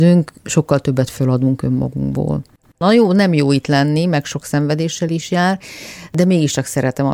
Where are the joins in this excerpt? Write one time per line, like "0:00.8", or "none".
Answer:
none

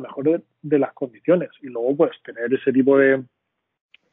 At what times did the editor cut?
none

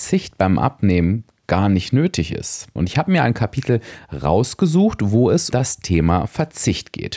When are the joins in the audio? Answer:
0:02.8
0:05.5

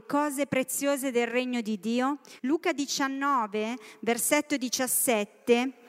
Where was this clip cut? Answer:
0:02.4

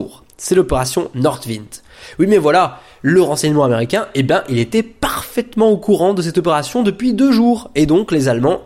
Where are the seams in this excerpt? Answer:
none

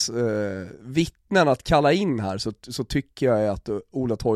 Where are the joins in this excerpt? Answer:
none

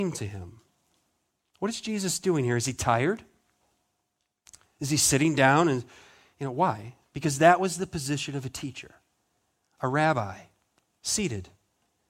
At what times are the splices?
none

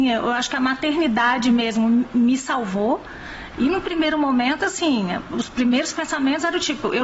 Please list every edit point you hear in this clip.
0:03.5

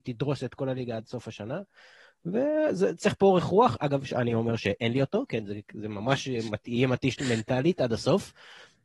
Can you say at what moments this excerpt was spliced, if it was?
none

